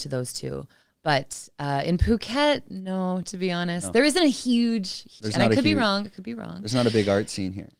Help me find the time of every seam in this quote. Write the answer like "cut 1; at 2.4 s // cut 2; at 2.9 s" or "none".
cut 1; at 5.2 s

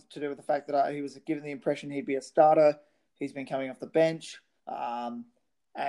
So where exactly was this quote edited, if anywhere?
cut 1; at 4.6 s

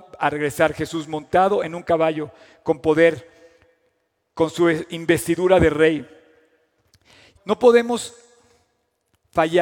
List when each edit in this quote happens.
cut 1; at 7.4 s

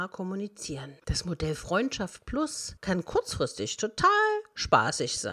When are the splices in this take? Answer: cut 1; at 1.0 s

